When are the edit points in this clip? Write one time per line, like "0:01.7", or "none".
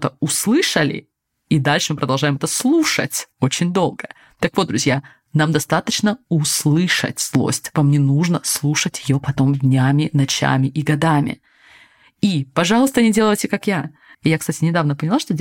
0:14.1